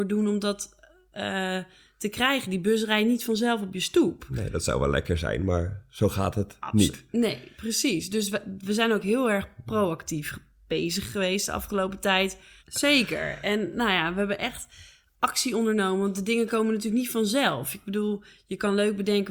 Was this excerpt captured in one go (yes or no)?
no